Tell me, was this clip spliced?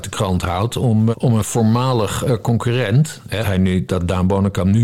yes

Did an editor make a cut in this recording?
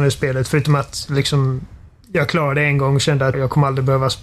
yes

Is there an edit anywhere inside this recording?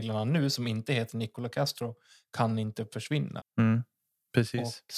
yes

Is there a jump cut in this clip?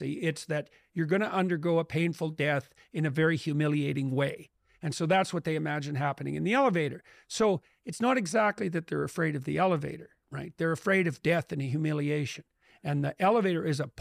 no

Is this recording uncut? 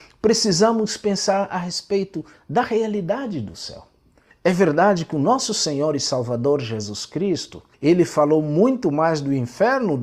no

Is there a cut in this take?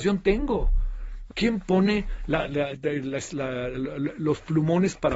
yes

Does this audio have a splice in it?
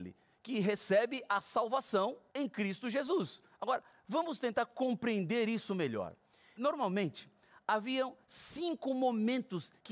yes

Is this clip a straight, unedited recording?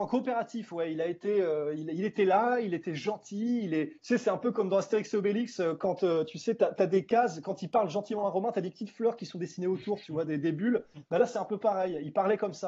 yes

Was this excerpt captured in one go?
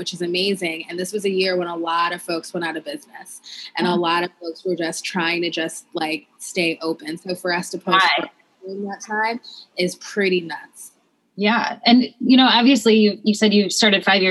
yes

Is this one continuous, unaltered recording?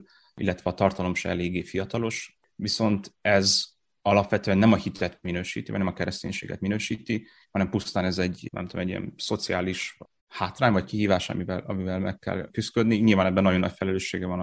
yes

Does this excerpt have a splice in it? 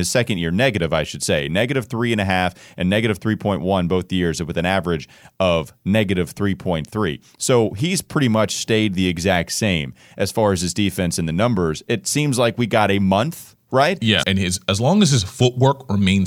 yes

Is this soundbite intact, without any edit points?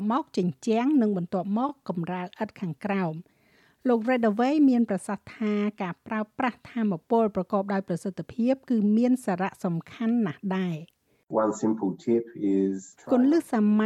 yes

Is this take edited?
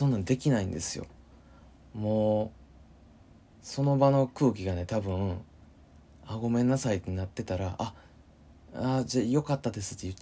no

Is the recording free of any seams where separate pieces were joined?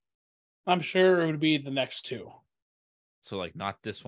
yes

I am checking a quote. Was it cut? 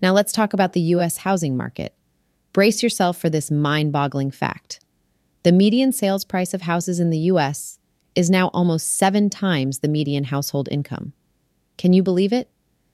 no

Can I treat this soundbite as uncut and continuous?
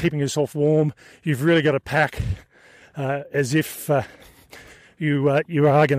yes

